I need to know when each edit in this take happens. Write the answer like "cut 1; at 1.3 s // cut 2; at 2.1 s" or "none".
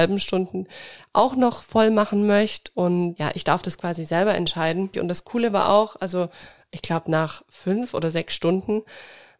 cut 1; at 4.9 s